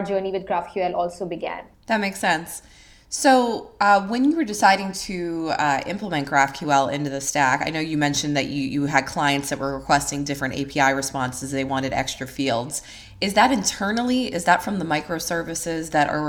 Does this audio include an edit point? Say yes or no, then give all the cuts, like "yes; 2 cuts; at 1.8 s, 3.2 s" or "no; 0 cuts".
yes; 1 cut; at 1.7 s